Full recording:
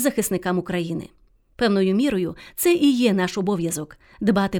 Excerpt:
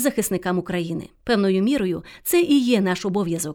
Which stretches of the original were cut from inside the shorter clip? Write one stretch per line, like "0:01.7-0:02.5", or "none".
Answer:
0:01.1-0:01.5

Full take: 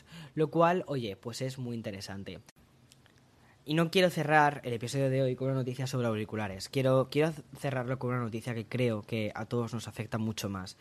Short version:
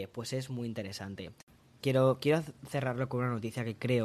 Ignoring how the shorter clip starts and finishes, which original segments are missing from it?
0:02.9-0:06.7

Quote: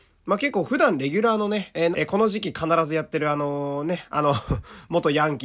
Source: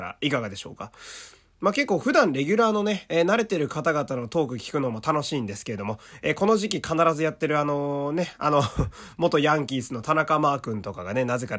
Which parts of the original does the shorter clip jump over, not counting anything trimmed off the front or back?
0:03.3-0:06.2

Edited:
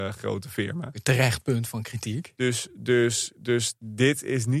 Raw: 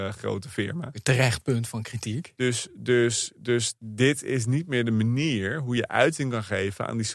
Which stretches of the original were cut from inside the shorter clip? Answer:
none

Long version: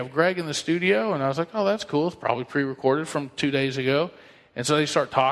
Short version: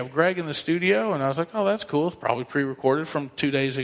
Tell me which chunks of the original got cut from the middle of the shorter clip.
none

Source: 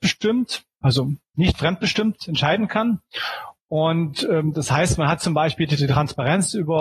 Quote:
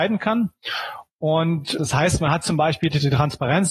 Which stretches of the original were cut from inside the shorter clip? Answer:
0:04.3-0:04.5

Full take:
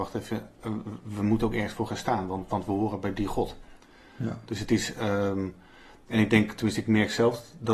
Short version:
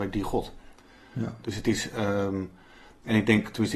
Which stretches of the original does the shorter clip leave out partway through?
none

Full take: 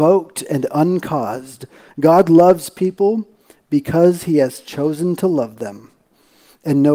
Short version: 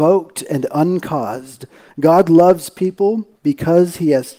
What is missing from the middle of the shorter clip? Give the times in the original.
0:03.4-0:03.6

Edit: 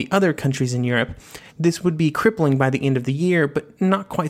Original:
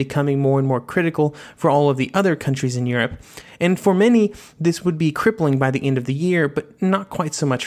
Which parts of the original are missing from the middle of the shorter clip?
0:03.5-0:04.5

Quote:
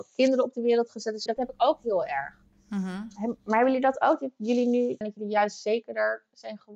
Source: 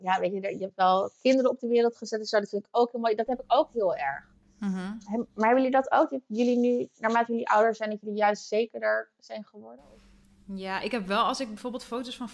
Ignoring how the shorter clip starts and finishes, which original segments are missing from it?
0:02.3-0:03.2
0:06.9-0:07.9

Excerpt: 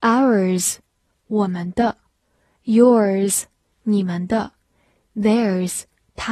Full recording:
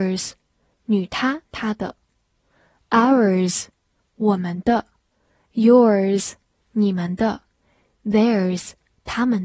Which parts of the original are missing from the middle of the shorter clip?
none

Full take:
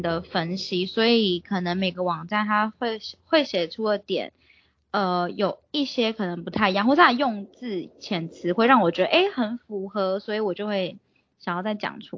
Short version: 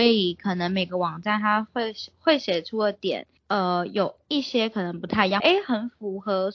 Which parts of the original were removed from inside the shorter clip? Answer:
0:04.4-0:04.8
0:06.8-0:09.1

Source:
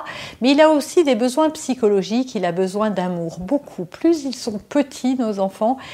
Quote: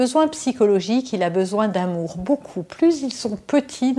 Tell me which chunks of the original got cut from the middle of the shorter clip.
none

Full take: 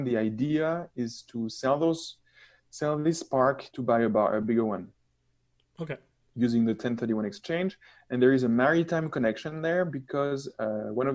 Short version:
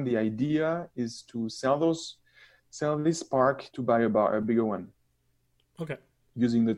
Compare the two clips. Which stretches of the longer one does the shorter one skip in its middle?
none

